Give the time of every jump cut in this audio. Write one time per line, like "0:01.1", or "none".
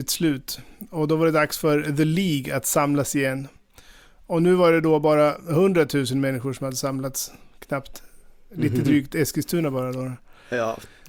none